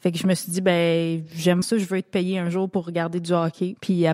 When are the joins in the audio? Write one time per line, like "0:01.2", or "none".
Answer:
0:01.6